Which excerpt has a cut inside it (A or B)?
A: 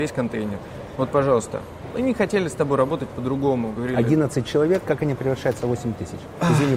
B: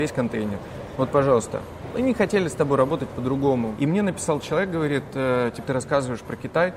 B